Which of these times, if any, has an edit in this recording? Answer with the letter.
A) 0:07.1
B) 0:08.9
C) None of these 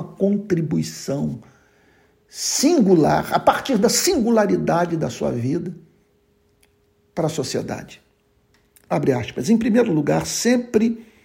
B